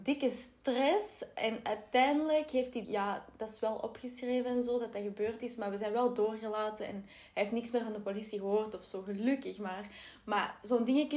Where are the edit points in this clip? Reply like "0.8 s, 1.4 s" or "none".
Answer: 2.8 s